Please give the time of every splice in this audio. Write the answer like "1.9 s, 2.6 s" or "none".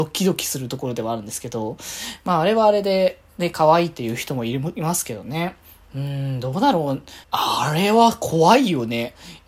7.2 s